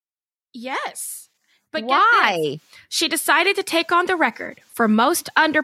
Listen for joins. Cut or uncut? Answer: uncut